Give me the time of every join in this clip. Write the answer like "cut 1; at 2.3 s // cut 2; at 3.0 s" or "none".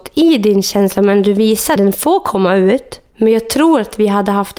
cut 1; at 1.8 s